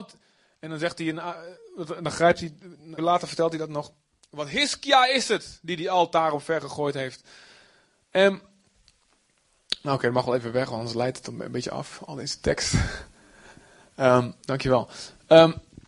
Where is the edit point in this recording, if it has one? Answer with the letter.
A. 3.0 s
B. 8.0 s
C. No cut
A